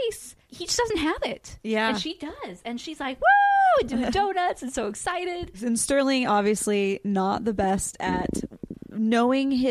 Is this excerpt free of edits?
yes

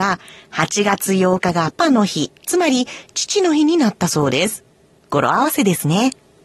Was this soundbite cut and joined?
yes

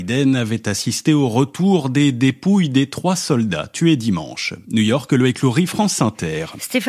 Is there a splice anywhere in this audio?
no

